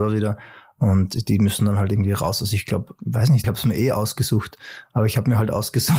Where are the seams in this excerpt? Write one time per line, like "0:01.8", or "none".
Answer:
0:03.4